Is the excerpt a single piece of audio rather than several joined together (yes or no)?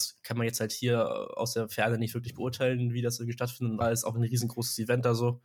no